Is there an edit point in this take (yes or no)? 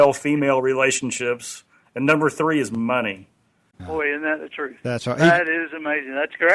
yes